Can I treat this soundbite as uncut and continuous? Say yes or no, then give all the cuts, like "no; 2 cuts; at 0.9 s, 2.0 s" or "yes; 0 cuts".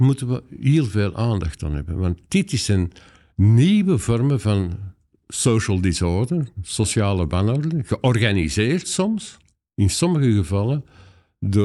yes; 0 cuts